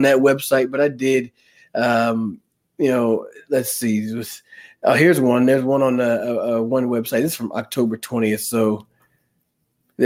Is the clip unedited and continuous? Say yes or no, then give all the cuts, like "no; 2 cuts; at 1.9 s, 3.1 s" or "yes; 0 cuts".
yes; 0 cuts